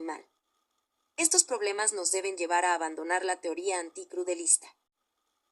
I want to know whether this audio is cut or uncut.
uncut